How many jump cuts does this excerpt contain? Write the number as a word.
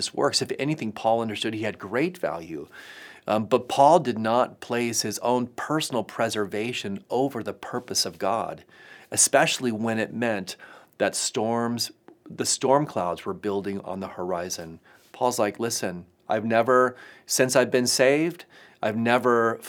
zero